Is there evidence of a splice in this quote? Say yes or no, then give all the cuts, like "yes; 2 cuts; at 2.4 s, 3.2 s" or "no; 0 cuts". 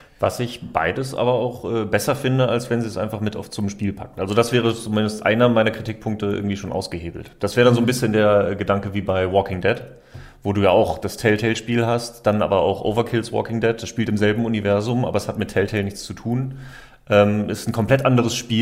no; 0 cuts